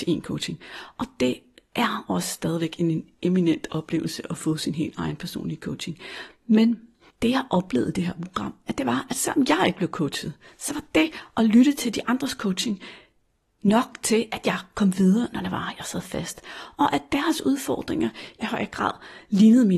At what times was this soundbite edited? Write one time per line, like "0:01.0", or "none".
0:18.4